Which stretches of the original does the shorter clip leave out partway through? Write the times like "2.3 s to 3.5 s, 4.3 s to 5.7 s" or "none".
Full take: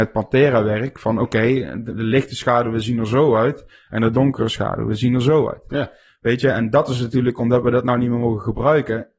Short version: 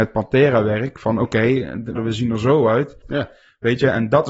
2.0 s to 2.6 s, 3.7 s to 5.6 s